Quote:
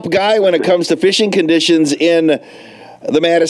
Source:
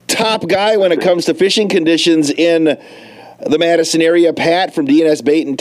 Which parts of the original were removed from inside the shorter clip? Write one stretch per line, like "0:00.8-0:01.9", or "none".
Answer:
none